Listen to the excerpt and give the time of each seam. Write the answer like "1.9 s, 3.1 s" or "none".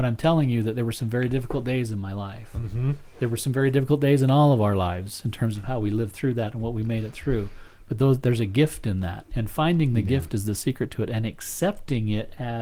none